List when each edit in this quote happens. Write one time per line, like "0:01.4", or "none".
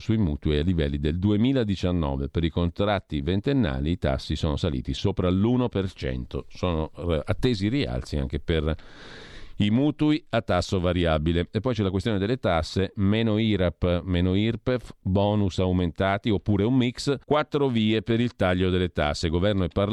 0:17.2

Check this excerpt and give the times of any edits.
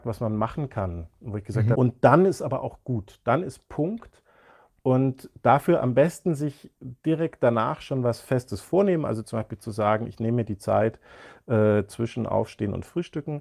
0:01.7

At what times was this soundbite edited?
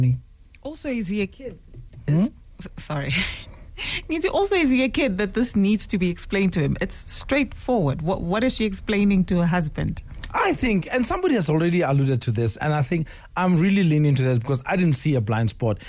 0:12.6

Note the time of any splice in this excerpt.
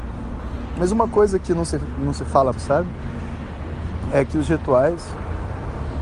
0:02.5

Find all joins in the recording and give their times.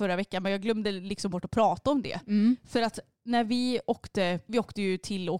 0:04.5

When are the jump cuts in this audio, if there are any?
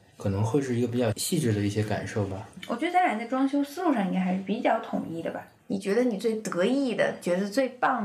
0:05.6

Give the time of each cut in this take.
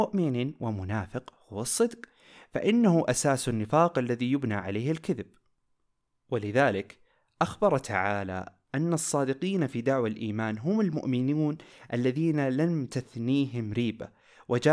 none

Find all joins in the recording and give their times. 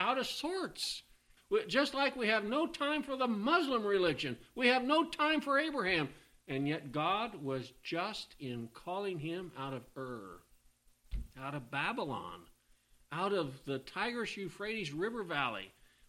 0:01.4
0:11.3

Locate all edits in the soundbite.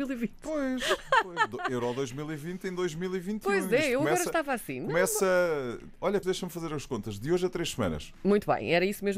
0:06.2

